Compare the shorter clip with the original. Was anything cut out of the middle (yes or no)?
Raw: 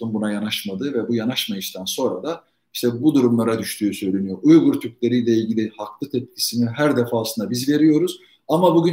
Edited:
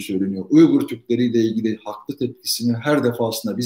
no